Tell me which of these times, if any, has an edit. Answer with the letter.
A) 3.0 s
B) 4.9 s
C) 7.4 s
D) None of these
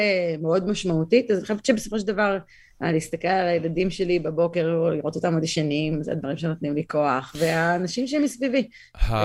D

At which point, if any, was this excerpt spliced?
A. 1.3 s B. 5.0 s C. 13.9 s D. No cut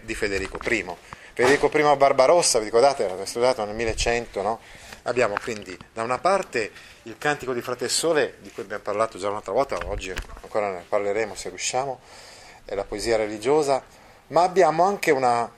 B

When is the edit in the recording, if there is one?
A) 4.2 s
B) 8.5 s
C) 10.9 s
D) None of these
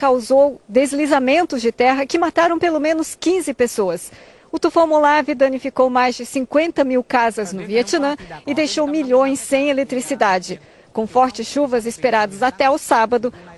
D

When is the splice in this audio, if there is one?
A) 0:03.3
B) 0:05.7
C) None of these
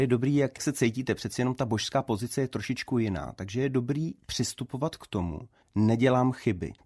B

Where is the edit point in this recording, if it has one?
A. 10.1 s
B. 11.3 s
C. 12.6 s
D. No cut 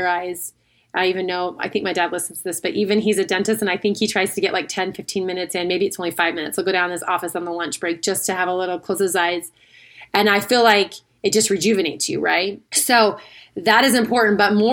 C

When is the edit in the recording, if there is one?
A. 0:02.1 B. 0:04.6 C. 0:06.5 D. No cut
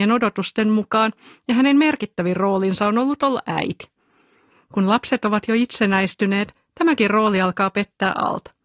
D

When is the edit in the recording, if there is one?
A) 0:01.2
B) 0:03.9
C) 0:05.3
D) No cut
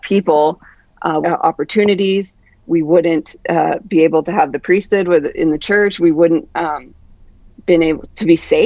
A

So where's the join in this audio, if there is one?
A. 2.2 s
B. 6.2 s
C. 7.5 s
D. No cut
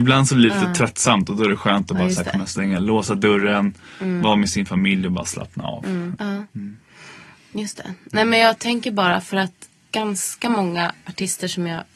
B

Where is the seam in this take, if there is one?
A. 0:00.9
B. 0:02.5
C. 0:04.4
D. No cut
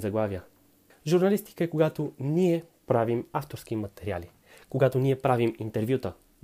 A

